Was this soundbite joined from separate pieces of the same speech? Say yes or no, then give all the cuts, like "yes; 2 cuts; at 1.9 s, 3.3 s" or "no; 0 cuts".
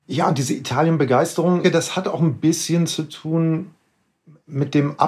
yes; 1 cut; at 1.6 s